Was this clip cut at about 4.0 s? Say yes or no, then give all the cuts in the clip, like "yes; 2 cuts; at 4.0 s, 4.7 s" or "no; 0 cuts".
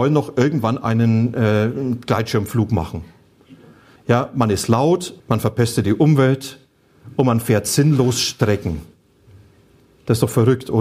yes; 2 cuts; at 4.0 s, 5.2 s